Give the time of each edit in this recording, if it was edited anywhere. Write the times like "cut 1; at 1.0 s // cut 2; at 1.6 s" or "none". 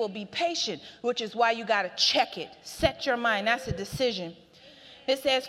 none

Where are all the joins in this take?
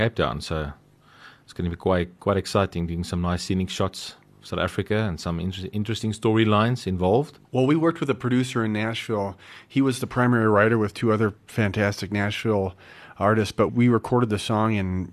cut 1; at 7.4 s // cut 2; at 13.7 s

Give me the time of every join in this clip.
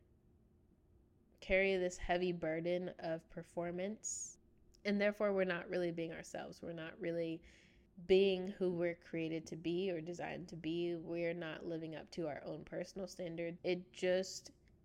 cut 1; at 13.6 s

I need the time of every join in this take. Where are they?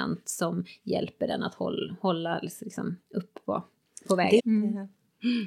cut 1; at 4.4 s

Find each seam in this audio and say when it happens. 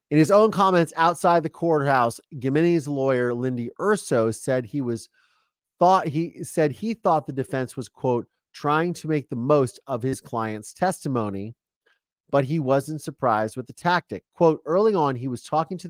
none

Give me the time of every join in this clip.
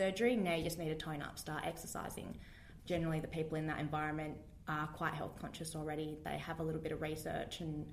cut 1; at 2.8 s

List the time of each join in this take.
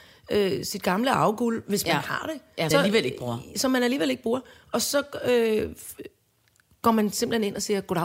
cut 1; at 2.7 s

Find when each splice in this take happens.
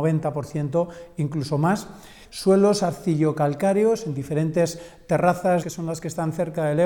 cut 1; at 2.2 s // cut 2; at 5.6 s

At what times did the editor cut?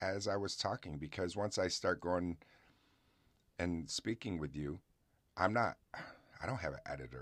none

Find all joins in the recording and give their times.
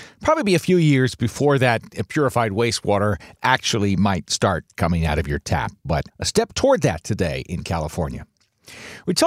cut 1; at 6.1 s

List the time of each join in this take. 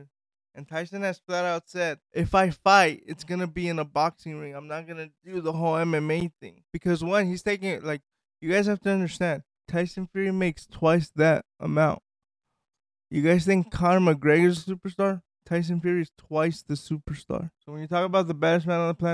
cut 1; at 9.6 s // cut 2; at 17.6 s

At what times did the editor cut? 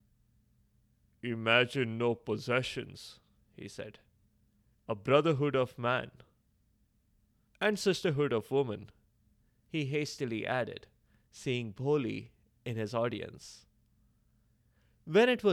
cut 1; at 4.7 s

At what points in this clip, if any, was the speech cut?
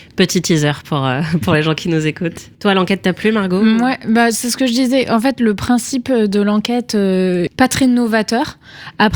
cut 1; at 2.5 s // cut 2; at 7.5 s

